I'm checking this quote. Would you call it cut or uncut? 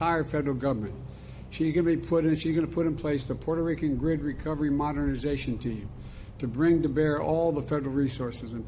uncut